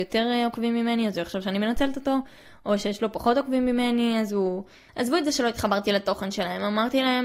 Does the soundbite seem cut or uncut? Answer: cut